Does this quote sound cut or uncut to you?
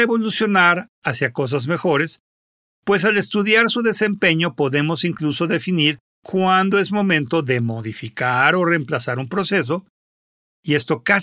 uncut